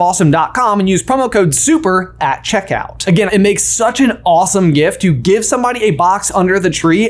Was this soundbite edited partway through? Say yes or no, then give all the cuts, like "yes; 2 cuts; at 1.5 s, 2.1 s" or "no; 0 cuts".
yes; 1 cut; at 3.3 s